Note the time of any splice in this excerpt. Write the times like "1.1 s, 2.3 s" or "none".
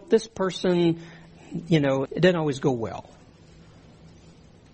2.1 s